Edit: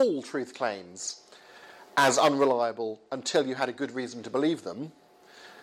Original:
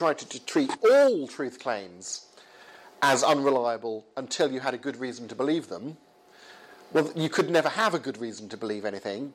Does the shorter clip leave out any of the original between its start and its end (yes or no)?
no